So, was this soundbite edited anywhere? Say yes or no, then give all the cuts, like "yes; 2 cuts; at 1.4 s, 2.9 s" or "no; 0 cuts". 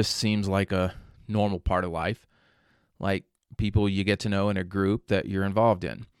no; 0 cuts